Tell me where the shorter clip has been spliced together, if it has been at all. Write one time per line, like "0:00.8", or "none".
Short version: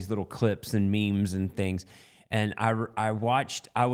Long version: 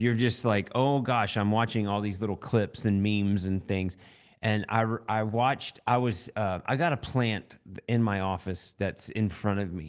none